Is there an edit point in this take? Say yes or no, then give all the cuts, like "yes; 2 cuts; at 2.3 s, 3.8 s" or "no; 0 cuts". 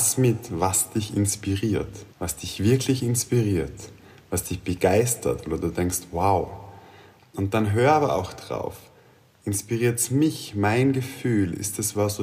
yes; 1 cut; at 2.1 s